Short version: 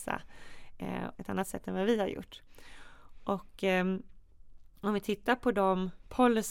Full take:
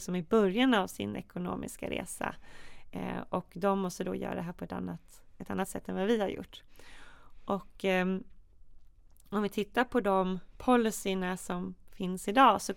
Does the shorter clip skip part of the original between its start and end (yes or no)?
yes